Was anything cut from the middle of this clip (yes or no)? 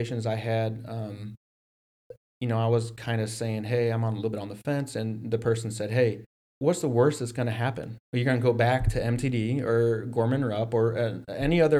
yes